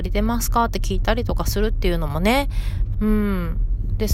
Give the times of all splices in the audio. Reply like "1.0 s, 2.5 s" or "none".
2.9 s

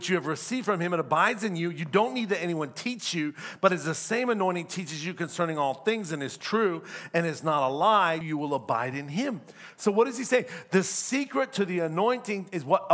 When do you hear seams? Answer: 8.2 s

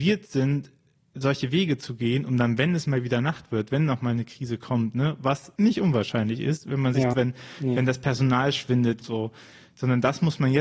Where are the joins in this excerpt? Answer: 5.6 s, 7.1 s, 9.0 s

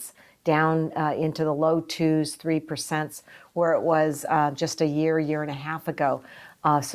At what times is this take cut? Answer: none

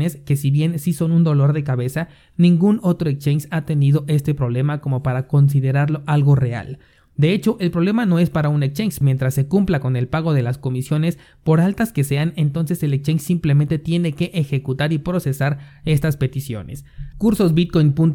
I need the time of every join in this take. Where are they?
9.0 s, 17.1 s

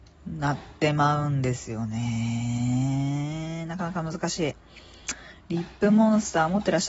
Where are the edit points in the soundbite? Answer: none

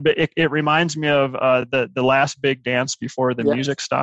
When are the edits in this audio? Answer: none

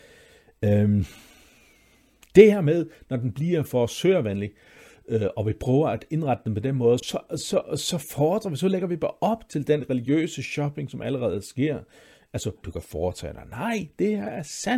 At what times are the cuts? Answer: 7.0 s, 12.6 s

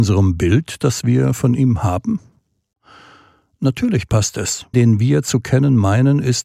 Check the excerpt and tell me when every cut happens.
4.7 s

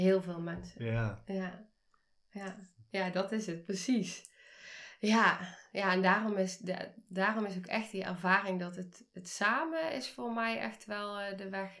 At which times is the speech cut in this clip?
none

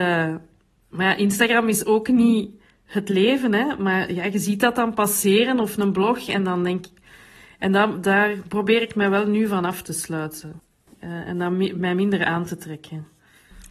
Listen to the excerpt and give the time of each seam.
10.9 s

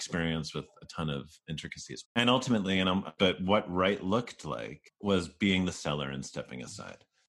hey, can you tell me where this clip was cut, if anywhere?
2.0 s, 3.2 s

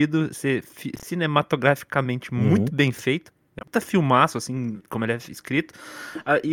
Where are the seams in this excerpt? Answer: 3.6 s, 4.8 s

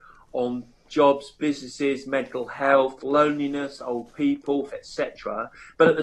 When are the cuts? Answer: 4.7 s

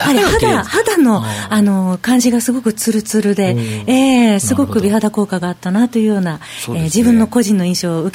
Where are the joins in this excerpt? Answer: none

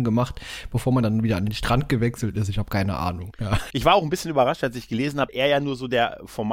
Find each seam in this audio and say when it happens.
3.7 s, 5.3 s

